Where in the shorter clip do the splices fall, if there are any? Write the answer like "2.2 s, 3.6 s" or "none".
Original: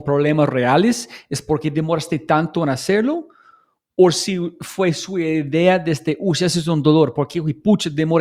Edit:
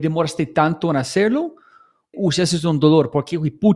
2.1 s

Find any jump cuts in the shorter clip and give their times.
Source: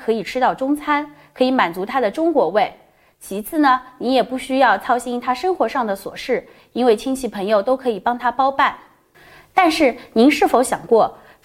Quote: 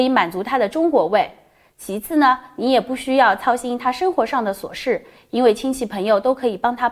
none

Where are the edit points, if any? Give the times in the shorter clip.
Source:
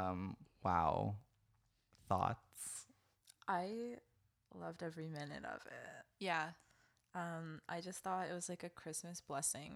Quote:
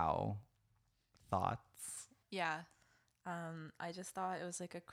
2.2 s

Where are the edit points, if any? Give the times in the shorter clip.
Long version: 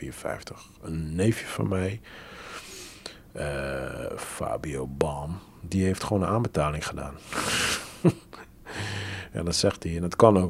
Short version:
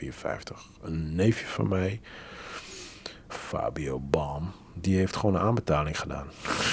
3.3 s

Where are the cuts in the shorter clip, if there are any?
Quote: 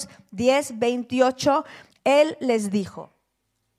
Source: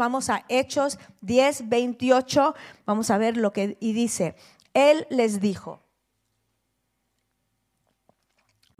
1.9 s

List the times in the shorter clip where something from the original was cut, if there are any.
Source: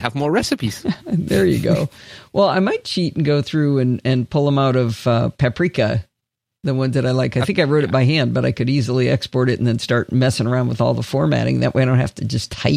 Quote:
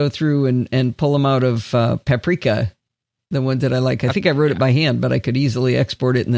none

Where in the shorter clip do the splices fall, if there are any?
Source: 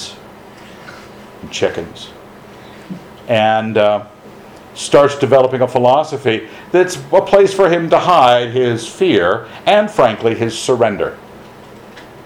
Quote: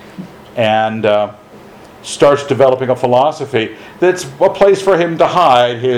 none

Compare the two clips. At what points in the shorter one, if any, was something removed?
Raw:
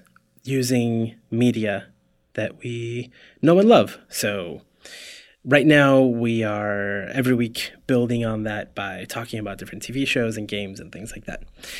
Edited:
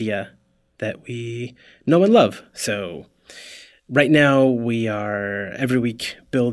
none

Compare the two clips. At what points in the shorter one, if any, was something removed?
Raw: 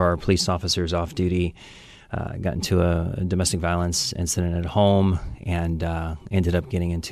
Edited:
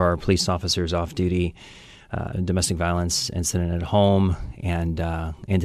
2.3 s

